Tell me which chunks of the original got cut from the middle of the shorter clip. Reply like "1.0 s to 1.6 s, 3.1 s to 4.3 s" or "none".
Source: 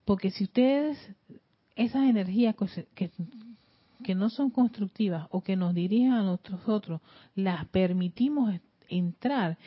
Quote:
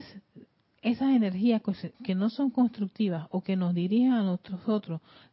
2.9 s to 3.9 s